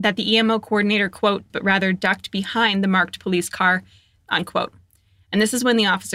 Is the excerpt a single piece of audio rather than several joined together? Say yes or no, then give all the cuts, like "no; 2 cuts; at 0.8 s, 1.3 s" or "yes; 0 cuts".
no; 2 cuts; at 1.5 s, 4.2 s